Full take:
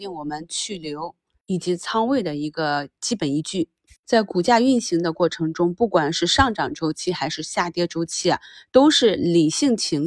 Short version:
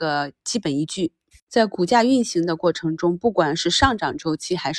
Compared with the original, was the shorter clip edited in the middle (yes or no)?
no